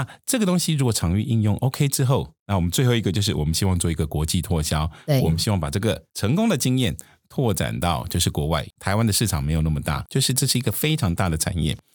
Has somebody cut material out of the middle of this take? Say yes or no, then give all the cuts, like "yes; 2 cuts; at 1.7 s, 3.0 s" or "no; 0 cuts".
yes; 2 cuts; at 8.7 s, 10.1 s